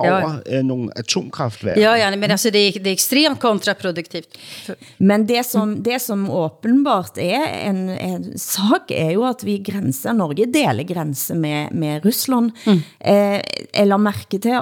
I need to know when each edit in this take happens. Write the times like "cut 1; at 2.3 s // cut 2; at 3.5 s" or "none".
none